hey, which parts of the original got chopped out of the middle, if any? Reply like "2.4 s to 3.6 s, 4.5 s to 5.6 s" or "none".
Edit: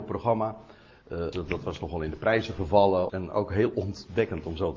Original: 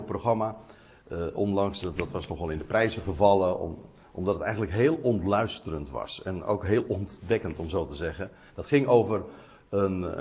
1.3 s to 1.8 s, 3.6 s to 6.2 s